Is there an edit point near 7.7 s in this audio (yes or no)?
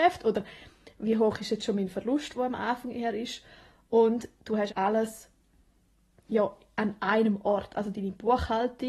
no